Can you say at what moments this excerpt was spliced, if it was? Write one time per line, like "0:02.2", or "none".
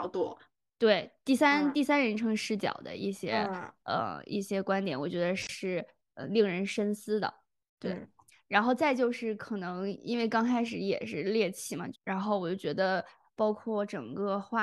0:07.8
0:11.9